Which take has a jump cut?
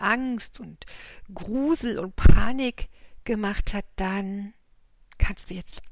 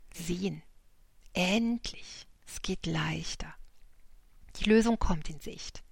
second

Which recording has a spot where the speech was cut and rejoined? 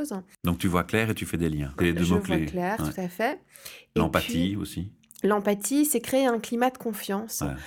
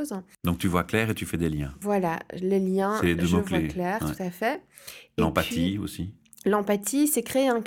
first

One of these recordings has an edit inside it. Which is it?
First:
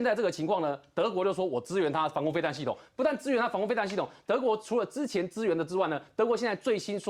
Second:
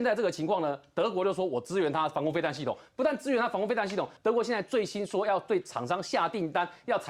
second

